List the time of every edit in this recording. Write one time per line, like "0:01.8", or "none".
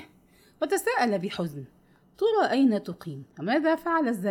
0:03.3

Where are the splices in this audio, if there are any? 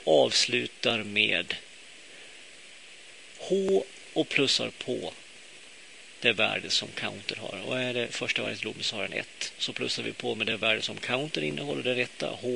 0:09.5

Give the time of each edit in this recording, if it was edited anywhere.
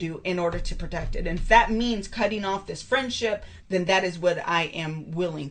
0:03.6

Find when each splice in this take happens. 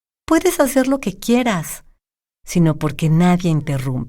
0:02.3

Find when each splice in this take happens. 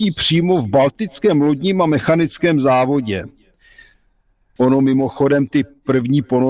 0:04.6

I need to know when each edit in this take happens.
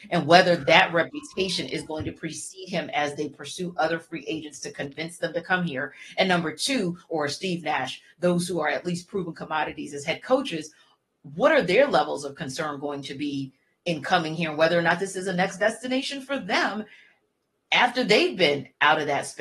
0:07.1

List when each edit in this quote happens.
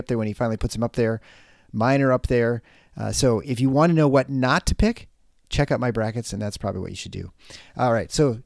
none

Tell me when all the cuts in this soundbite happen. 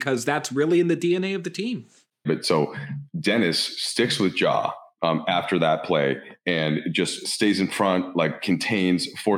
0:02.2

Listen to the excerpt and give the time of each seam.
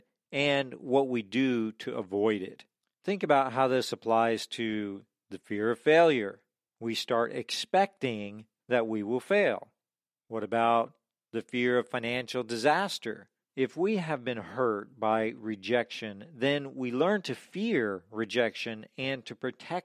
0:13.5

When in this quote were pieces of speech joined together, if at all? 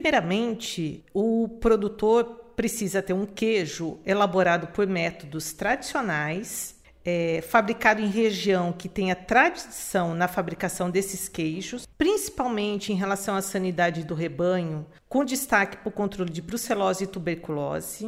0:11.9

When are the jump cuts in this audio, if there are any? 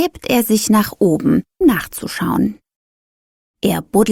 0:01.6

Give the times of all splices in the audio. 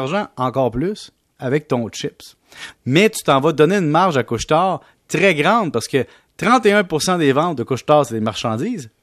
0:02.7

